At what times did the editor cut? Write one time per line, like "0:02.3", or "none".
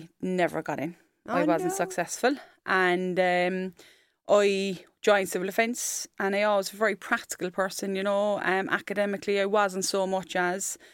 none